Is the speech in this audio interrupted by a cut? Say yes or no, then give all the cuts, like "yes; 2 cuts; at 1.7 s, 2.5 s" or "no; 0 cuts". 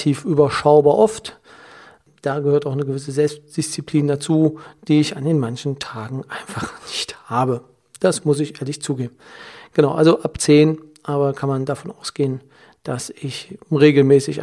no; 0 cuts